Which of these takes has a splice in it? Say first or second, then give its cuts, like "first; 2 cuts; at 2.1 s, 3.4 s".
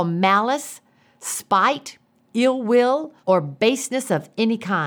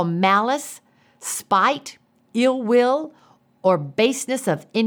first; 1 cut; at 3.2 s